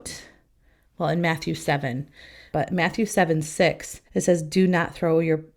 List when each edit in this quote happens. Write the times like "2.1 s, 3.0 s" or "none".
2.5 s, 4.1 s